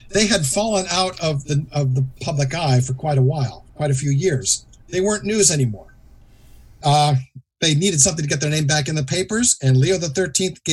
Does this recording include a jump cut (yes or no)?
yes